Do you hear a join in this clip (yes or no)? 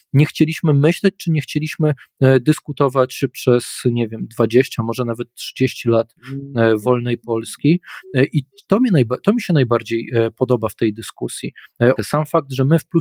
yes